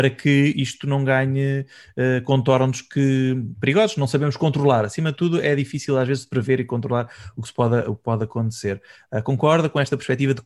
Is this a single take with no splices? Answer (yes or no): yes